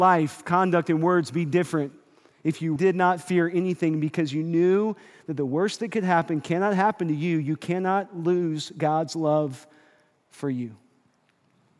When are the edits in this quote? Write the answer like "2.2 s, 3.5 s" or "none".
2.8 s